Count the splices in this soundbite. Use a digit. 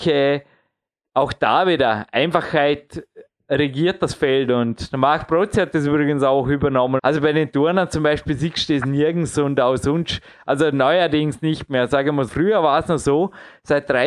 2